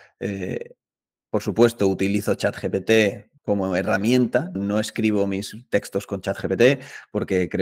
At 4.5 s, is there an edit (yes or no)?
yes